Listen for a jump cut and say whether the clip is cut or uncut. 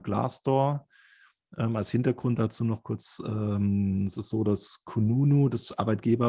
uncut